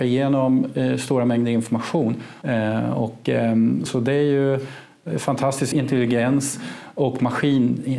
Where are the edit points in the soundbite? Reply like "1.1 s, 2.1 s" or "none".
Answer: 2.4 s, 3.9 s, 5.7 s